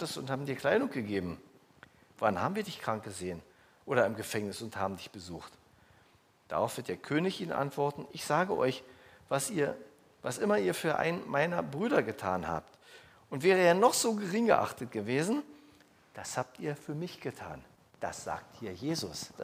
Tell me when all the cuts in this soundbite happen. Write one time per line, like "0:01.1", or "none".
none